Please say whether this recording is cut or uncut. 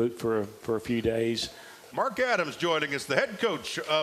cut